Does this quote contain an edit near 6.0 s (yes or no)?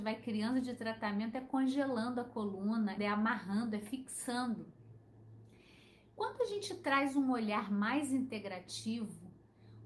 no